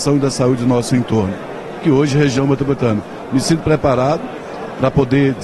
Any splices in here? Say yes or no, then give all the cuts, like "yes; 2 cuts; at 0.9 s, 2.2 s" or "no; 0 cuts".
no; 0 cuts